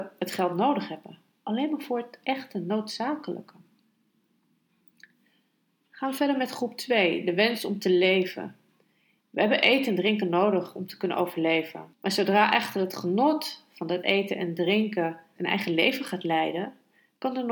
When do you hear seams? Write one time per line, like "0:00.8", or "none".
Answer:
0:09.2
0:11.9
0:15.4